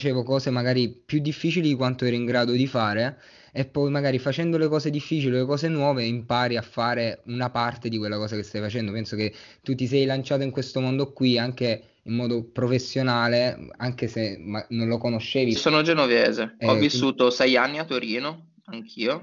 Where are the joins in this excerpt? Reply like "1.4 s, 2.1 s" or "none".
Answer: 15.6 s